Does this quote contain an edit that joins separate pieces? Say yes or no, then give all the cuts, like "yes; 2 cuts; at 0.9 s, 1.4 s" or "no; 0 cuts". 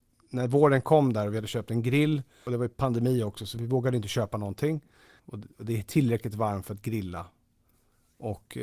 yes; 2 cuts; at 3.6 s, 5.2 s